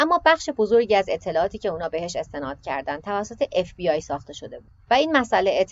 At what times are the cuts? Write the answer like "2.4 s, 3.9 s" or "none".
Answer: 4.8 s